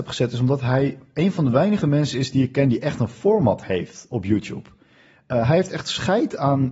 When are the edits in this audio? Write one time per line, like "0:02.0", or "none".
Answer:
none